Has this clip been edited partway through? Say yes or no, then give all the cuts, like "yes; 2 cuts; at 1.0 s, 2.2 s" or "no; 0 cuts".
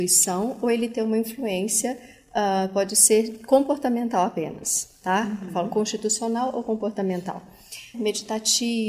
yes; 1 cut; at 7.9 s